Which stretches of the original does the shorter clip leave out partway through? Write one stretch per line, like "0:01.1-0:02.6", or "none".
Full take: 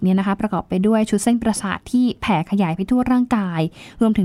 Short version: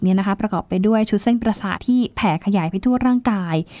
0:01.8-0:01.8